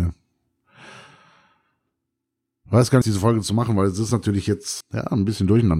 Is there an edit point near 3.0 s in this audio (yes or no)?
yes